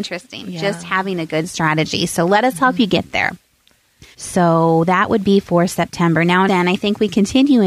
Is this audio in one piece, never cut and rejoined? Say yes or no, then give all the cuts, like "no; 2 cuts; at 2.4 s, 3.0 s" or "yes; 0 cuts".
no; 2 cuts; at 4.1 s, 6.5 s